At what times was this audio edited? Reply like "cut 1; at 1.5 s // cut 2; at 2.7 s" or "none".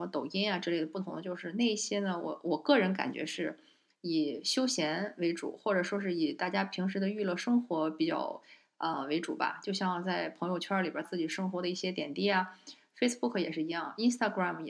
cut 1; at 11.0 s